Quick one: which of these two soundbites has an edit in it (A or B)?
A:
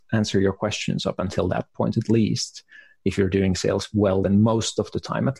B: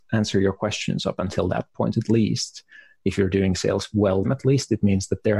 B